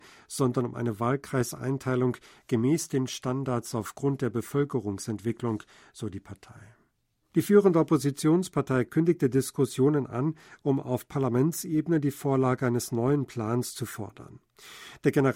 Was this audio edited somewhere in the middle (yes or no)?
yes